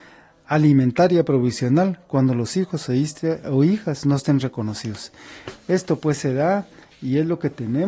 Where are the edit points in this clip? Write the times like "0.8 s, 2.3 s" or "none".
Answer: none

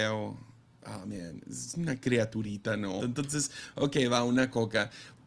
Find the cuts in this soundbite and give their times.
3.0 s

